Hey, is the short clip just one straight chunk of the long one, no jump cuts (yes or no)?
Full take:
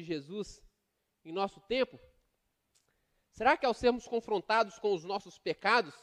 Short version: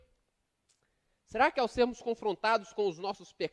yes